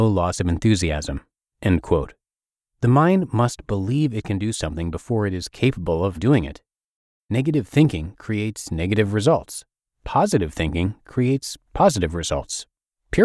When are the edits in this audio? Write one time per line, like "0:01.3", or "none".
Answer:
0:06.1